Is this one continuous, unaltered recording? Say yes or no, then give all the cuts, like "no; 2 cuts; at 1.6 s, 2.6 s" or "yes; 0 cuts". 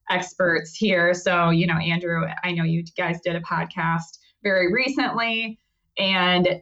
yes; 0 cuts